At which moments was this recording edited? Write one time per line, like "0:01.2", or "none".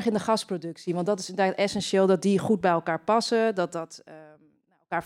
none